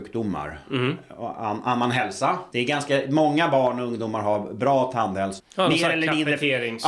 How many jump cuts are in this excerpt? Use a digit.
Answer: 2